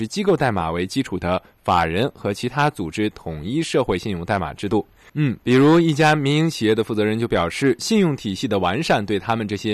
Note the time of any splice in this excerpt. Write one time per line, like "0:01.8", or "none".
0:05.1